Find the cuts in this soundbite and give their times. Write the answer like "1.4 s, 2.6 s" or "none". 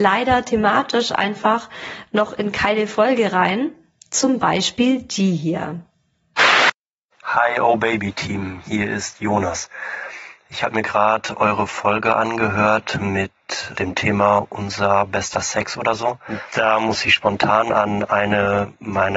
13.8 s

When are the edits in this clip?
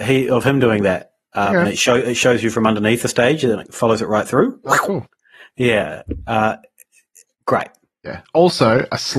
7.3 s

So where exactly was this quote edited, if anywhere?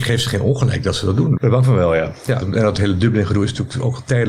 1.4 s, 2.4 s

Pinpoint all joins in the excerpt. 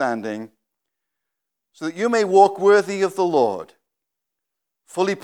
none

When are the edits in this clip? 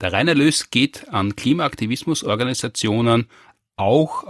none

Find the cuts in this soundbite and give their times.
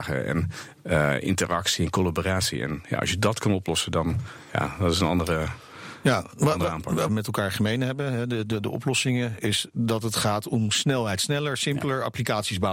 7.1 s

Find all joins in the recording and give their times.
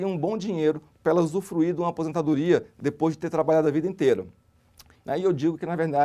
4.9 s

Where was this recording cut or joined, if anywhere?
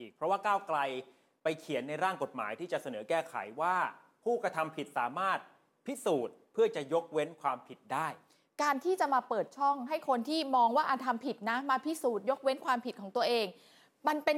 none

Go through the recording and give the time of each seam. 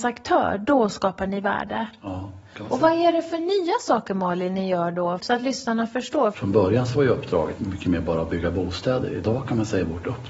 5.2 s, 6.3 s, 7.6 s

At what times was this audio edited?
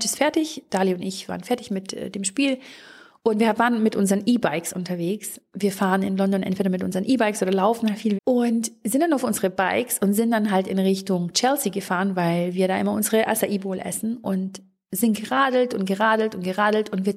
8.1 s

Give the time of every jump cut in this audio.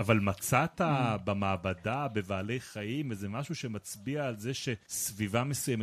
none

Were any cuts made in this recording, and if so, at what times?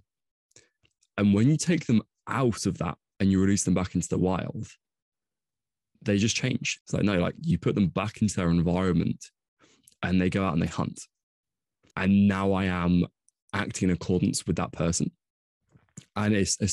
6.8 s, 11.9 s

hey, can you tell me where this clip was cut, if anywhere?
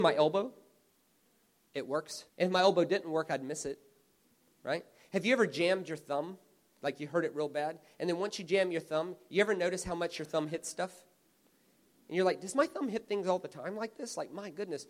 2.3 s

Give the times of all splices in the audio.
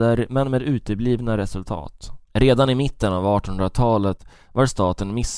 2.2 s

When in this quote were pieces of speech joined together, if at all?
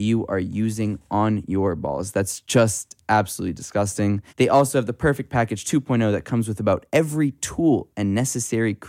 4.3 s

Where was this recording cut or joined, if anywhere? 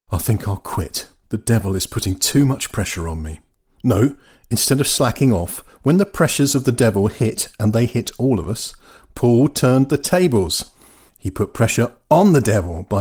none

